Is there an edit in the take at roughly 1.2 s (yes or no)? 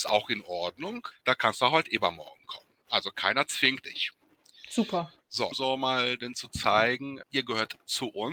no